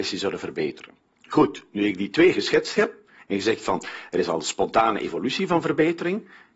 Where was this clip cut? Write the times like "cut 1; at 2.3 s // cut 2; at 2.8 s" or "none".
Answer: cut 1; at 1.1 s